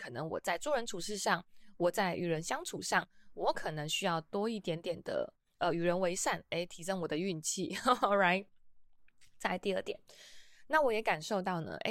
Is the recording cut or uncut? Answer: uncut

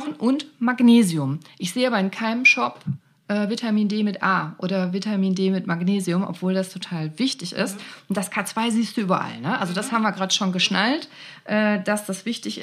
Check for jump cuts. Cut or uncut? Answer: uncut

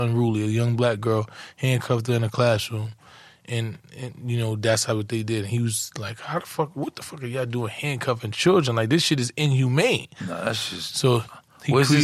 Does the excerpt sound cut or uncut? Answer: uncut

